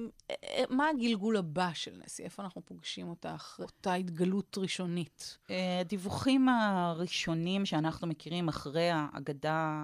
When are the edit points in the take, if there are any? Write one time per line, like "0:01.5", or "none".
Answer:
0:03.6